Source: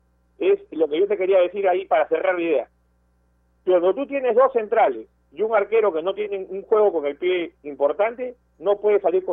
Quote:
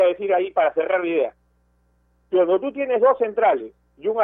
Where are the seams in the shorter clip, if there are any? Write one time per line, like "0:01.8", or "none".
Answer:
none